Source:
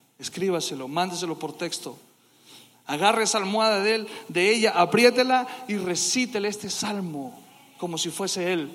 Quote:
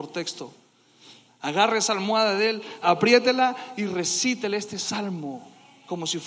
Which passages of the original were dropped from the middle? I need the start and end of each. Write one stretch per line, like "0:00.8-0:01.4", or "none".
0:04.3-0:04.7